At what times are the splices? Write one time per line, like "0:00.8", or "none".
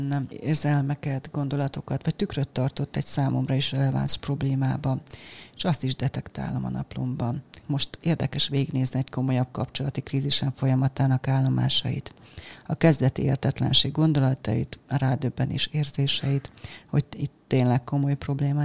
0:07.6